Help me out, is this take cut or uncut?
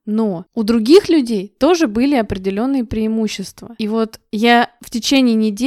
uncut